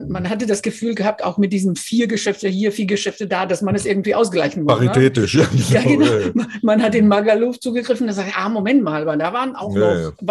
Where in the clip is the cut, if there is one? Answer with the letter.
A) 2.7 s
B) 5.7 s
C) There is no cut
C